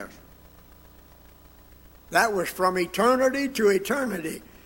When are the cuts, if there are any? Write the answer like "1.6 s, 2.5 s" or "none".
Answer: 1.9 s